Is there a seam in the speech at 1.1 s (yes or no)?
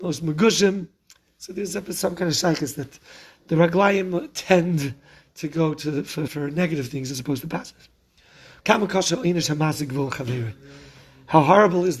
no